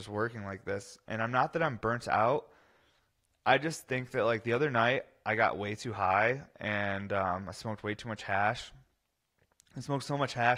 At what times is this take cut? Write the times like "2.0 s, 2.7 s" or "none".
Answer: none